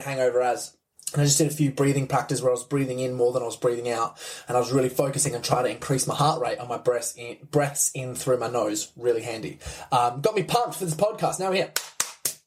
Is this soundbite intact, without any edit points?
no; 1 cut; at 0.9 s

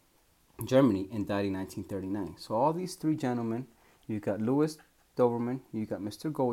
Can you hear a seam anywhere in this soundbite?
no; 0 cuts

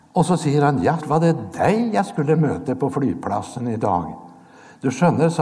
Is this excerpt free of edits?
no; 1 cut; at 1.0 s

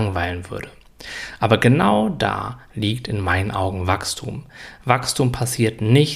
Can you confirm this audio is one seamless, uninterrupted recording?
yes; 0 cuts

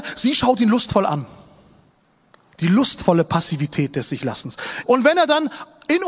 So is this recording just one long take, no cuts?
no; 2 cuts; at 2.5 s, 4.8 s

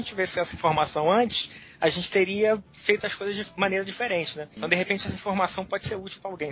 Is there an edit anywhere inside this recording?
no; 0 cuts

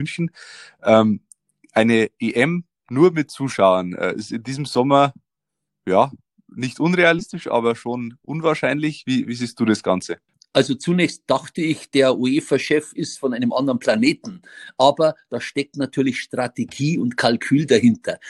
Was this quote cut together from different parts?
no; 0 cuts

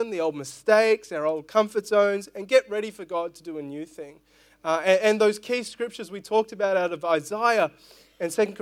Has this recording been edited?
no; 0 cuts

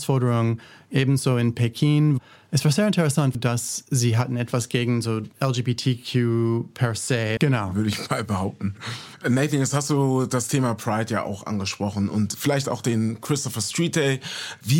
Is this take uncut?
no; 2 cuts; at 3.3 s, 7.4 s

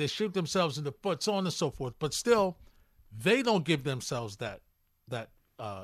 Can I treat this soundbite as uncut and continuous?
yes; 0 cuts

